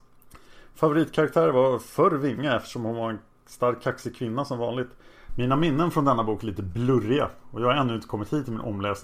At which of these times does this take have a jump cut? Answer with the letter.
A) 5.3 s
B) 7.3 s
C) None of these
A